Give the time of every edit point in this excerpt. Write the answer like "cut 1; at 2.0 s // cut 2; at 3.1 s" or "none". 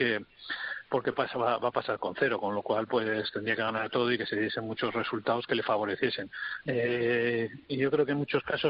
cut 1; at 6.6 s